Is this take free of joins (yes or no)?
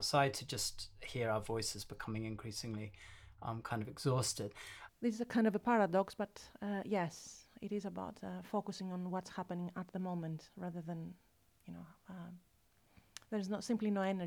no